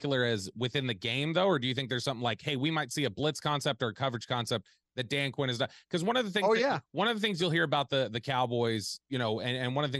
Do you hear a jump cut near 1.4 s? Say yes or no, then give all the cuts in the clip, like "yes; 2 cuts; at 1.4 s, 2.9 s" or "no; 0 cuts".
no; 1 cut; at 9.0 s